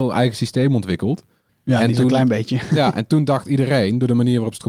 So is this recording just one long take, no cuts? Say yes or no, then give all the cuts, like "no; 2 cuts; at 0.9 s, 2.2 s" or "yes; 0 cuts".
no; 1 cut; at 1.5 s